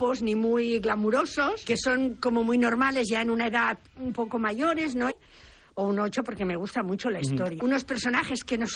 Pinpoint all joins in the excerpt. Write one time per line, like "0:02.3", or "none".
0:01.6
0:05.1
0:07.6